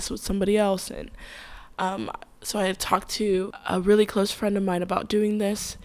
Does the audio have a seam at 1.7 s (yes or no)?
no